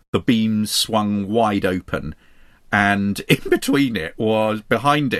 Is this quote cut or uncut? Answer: uncut